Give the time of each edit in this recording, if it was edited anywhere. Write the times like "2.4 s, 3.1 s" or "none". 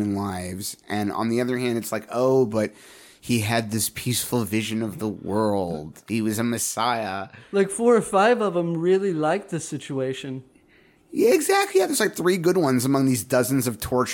none